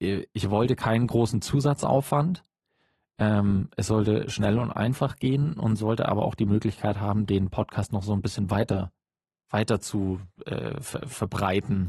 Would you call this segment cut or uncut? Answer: uncut